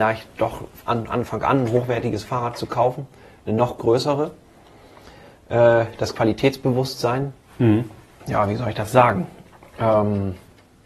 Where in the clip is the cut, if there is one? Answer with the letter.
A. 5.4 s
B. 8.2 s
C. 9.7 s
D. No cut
B